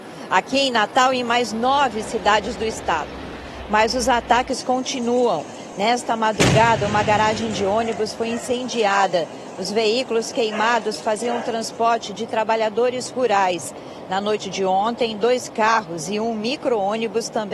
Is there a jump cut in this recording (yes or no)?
no